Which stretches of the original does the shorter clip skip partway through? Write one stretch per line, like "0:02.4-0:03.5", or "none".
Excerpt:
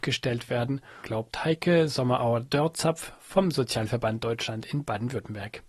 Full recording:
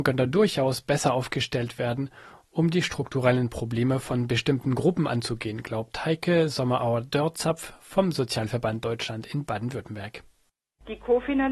0:02.3-0:05.6

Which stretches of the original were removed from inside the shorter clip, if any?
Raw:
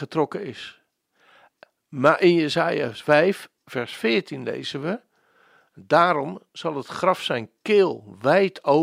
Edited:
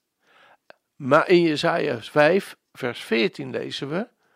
none

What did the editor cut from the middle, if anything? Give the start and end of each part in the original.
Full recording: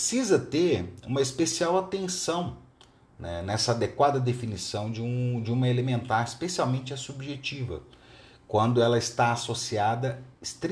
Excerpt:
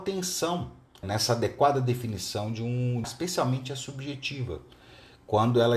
0:02.9-0:03.4
0:05.4-0:06.2

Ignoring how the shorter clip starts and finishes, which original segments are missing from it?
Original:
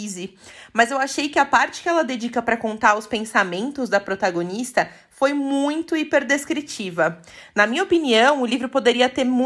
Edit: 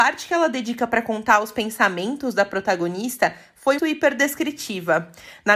0:05.3-0:05.9

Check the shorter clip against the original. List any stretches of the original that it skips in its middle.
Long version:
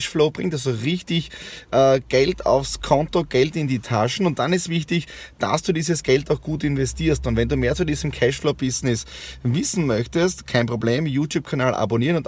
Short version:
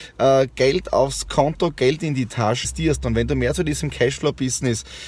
0:04.2-0:06.9

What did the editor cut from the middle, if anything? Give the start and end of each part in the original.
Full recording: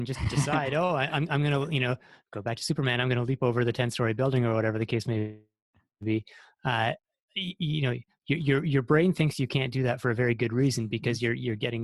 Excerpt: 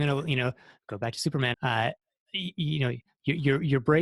0:03.0-0:06.6

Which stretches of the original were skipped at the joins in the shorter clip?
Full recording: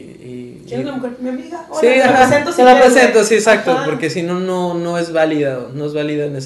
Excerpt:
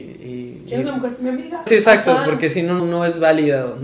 0:01.7-0:03.3
0:04.4-0:04.7

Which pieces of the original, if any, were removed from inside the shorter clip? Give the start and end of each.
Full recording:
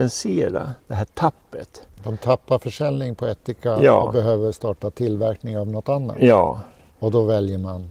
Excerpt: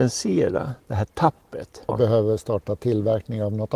0:01.9-0:04.0

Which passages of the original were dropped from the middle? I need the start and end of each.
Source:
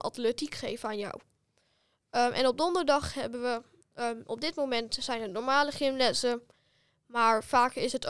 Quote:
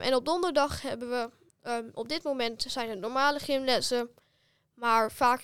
none

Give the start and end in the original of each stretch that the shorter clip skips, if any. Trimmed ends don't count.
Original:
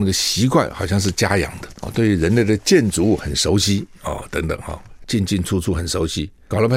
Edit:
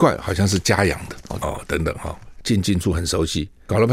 0:01.9-0:04.0
0:05.4-0:05.6

